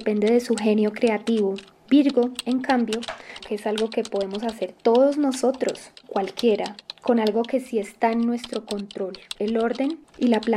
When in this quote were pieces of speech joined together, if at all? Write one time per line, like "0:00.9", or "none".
0:03.4
0:06.0
0:09.4